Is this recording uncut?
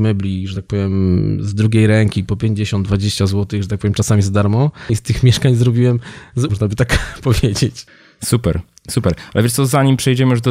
no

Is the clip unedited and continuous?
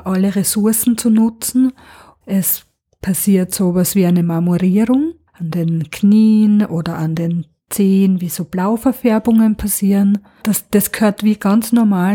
no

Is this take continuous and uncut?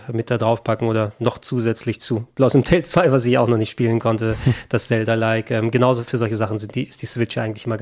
yes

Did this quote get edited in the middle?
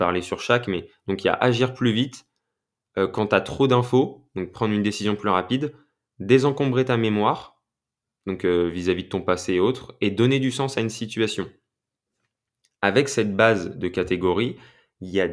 no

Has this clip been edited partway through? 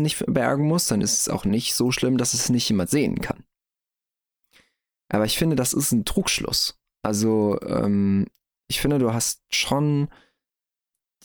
no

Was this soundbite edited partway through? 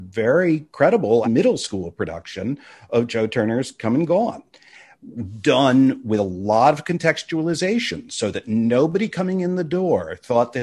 yes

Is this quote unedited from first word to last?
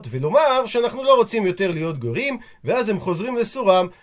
yes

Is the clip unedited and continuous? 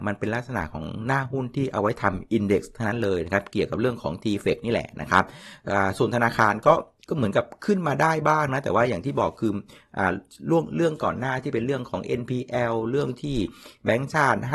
yes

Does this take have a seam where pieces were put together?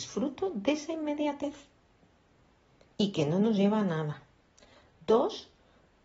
no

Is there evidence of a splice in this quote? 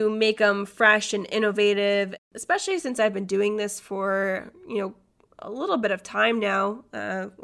no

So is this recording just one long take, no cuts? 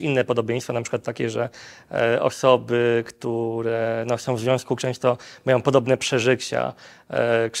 yes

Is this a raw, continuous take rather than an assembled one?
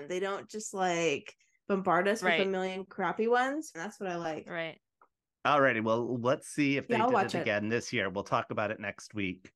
no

